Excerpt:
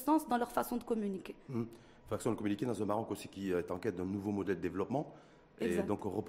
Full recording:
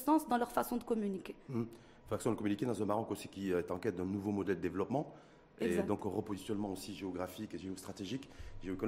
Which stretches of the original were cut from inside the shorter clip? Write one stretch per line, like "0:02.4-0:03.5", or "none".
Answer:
none